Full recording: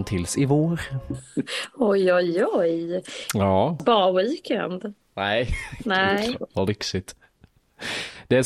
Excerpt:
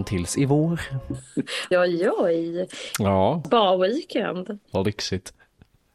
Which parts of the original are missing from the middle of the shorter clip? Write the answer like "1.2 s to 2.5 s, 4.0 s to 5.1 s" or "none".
1.7 s to 2.1 s, 5.0 s to 6.5 s